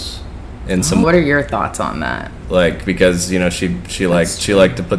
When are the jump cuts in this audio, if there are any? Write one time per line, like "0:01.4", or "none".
0:01.0
0:02.4